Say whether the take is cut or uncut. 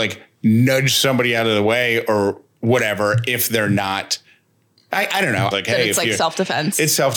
cut